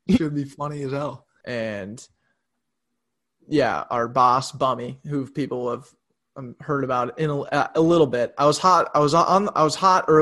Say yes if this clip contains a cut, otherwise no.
yes